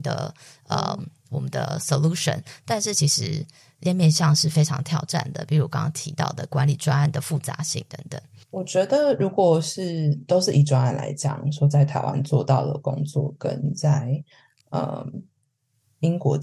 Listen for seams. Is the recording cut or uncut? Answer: uncut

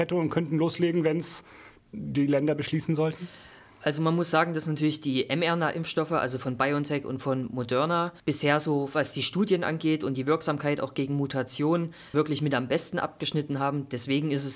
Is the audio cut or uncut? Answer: cut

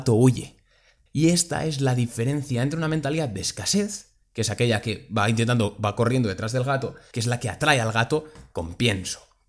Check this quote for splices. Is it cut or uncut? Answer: cut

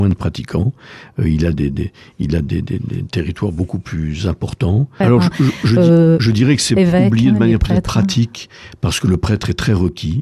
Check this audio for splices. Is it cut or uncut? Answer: cut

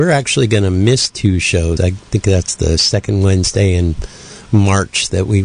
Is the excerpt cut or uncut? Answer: cut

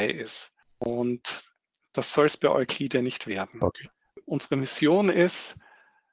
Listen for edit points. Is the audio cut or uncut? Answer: uncut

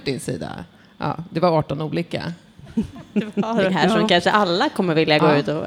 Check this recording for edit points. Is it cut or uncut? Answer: cut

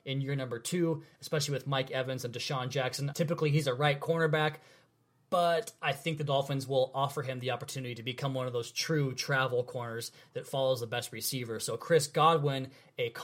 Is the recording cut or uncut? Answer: cut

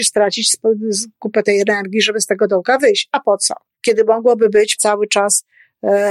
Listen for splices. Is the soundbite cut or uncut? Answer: cut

